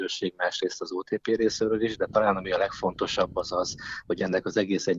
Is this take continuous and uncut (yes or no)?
yes